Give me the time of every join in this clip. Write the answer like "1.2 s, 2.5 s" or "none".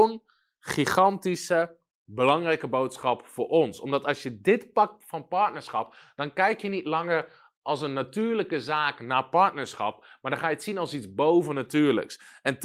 none